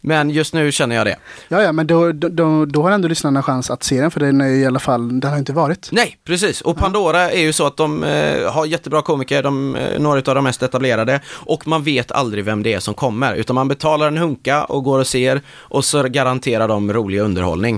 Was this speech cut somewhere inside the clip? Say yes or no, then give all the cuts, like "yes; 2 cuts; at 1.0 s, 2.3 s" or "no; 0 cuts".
no; 0 cuts